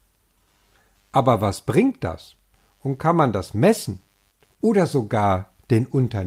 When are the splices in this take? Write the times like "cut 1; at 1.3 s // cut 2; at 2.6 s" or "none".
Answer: none